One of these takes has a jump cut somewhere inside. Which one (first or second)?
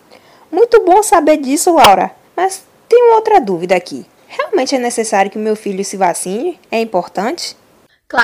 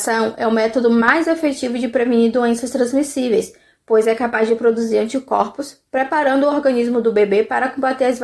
first